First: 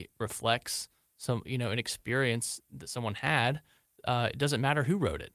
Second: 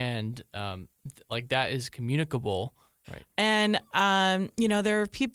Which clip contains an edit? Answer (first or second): second